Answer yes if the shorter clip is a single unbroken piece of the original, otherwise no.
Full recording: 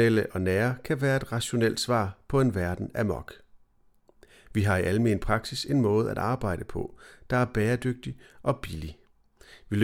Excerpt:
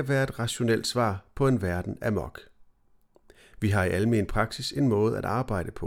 yes